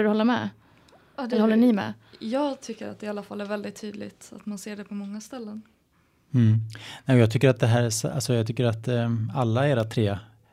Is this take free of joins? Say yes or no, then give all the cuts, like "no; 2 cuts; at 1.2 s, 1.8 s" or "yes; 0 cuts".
yes; 0 cuts